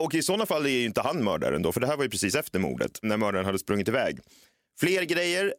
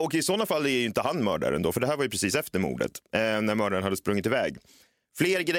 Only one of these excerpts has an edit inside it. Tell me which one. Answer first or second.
first